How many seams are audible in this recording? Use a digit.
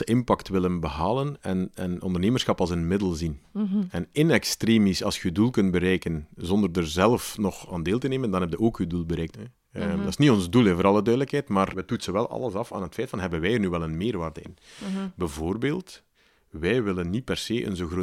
2